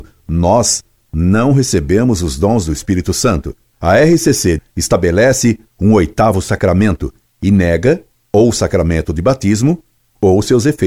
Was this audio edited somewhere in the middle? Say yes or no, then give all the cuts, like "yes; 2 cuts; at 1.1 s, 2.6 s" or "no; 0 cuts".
yes; 1 cut; at 4.6 s